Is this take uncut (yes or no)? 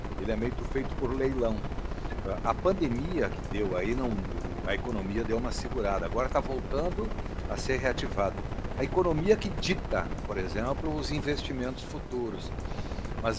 yes